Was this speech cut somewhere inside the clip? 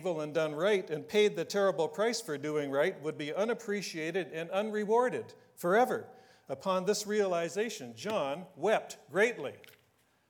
no; 0 cuts

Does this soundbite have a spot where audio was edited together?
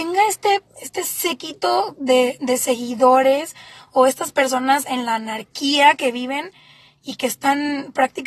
no; 0 cuts

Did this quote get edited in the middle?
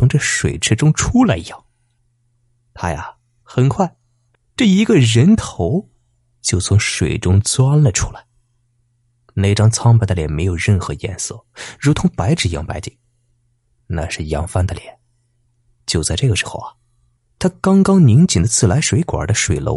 yes; 2 cuts; at 3.4 s, 15.6 s

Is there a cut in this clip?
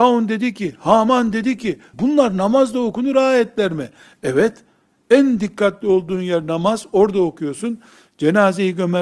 yes; 1 cut; at 1.9 s

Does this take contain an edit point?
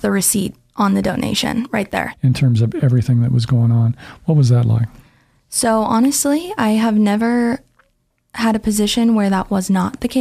yes; 1 cut; at 2.1 s

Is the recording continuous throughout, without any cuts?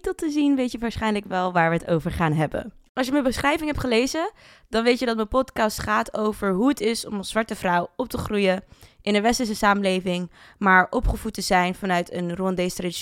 yes; 0 cuts

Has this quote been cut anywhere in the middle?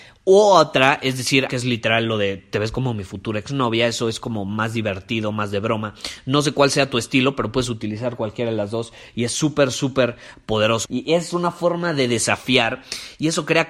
yes; 2 cuts; at 1.5 s, 10.8 s

